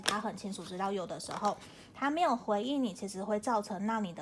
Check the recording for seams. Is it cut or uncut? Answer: uncut